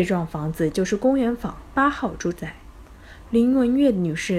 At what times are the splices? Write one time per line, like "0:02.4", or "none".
none